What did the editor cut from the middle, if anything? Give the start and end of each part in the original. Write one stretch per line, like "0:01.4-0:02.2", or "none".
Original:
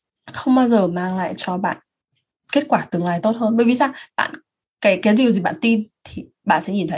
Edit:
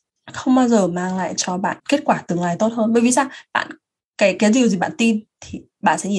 0:01.8-0:02.4